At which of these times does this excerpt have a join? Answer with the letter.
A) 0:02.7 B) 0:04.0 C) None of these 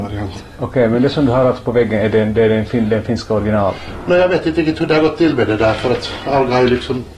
C